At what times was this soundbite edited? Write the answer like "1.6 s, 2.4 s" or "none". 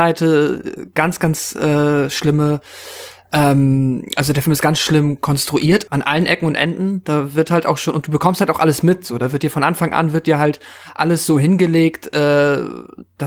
5.9 s